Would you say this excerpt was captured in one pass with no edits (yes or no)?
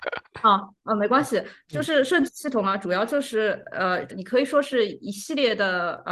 no